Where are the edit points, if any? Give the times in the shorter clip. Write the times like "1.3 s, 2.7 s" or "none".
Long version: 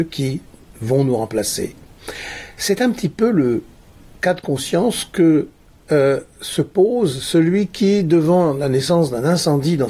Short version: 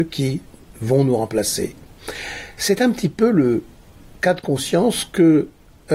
none

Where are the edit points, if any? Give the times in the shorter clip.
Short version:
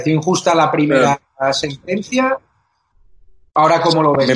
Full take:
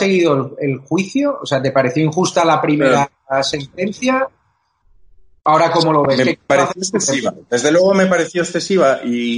none

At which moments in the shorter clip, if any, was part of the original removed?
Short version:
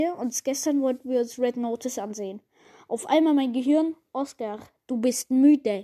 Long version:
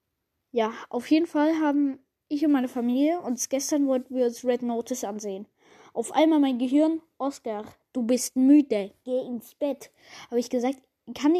none

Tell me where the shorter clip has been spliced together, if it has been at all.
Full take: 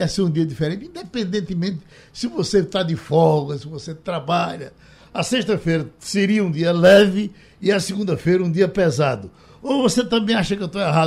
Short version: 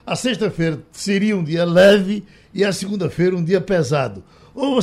none

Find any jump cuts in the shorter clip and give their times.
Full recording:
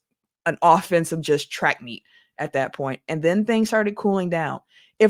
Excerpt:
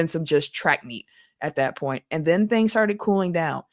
none

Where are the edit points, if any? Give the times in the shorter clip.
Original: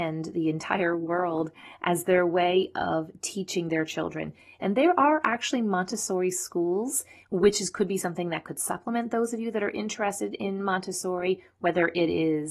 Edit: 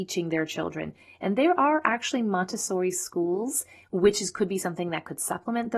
none

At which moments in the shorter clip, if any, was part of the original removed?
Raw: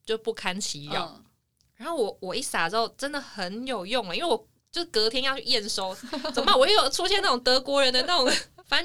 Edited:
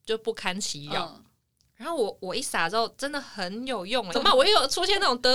4.1 s

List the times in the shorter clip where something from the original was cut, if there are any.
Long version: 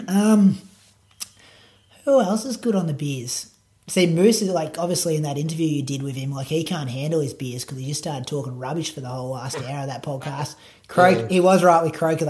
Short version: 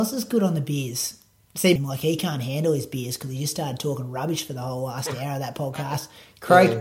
1.8 s

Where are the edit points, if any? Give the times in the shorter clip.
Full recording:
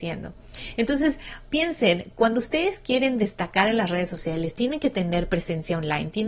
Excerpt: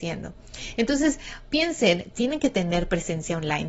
2.1 s

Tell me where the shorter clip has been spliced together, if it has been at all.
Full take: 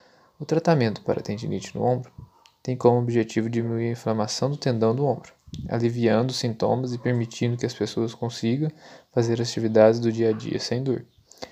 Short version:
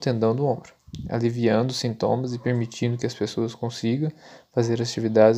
none

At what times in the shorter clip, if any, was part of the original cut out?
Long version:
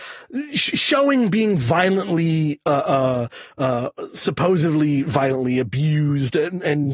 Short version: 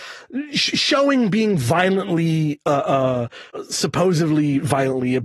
3.5 s

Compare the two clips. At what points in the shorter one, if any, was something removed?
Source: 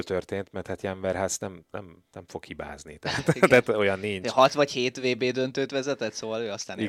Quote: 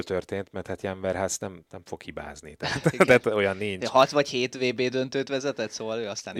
1.7 s

